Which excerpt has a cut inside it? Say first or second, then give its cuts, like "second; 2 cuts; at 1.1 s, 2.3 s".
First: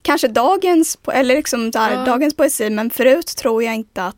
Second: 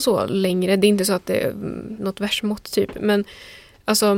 second; 1 cut; at 2.0 s